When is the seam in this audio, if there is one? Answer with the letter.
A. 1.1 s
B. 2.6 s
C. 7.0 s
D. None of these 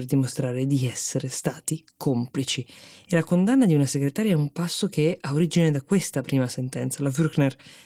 D